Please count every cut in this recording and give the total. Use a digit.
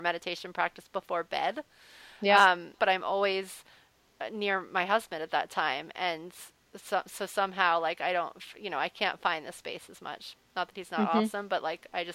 1